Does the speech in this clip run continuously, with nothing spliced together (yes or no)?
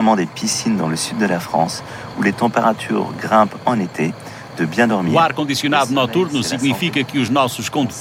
yes